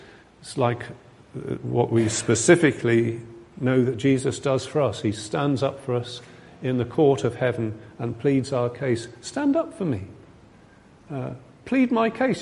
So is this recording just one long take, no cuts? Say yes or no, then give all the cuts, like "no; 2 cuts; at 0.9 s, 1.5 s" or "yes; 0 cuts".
yes; 0 cuts